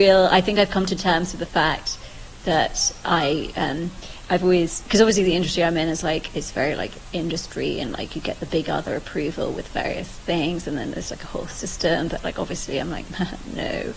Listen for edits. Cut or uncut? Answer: uncut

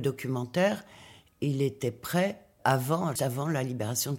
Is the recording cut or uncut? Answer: cut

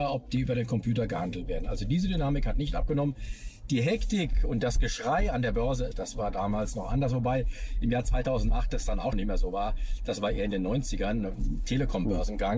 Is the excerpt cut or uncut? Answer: cut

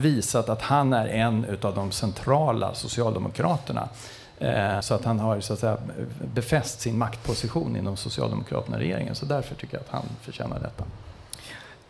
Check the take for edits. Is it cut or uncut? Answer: cut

